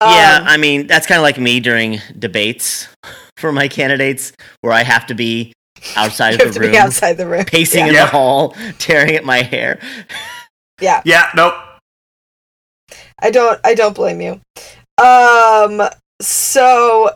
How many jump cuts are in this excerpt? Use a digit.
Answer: 0